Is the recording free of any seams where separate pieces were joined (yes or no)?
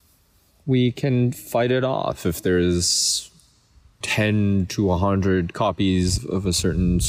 no